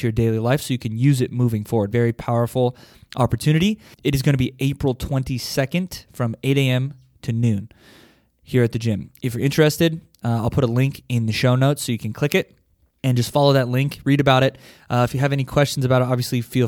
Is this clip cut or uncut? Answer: cut